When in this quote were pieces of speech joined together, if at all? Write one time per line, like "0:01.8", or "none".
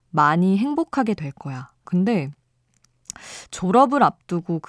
0:01.8